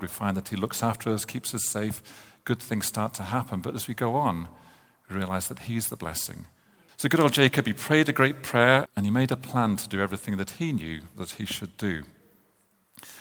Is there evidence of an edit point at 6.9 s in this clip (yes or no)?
yes